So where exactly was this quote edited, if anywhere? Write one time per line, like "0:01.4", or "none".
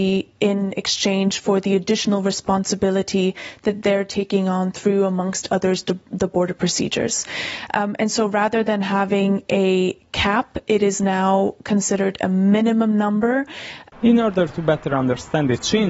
0:13.9